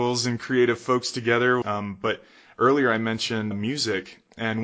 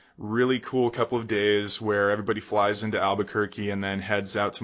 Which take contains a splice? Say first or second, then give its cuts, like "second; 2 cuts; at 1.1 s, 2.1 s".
first; 2 cuts; at 1.6 s, 3.5 s